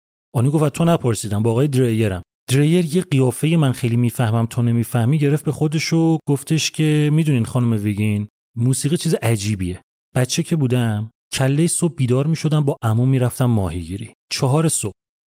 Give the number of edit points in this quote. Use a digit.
1